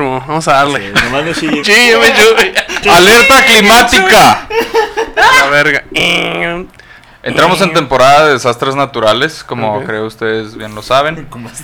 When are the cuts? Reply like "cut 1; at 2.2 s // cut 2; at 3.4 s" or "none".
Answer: cut 1; at 1.6 s // cut 2; at 2.8 s